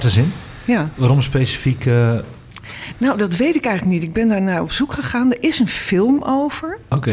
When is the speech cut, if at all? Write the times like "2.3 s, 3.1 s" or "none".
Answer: none